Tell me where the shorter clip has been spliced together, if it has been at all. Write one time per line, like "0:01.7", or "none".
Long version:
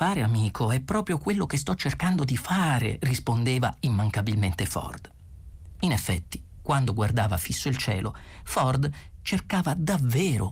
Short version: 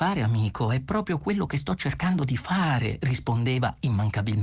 none